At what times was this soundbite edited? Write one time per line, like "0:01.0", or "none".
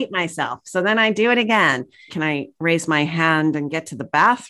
0:02.1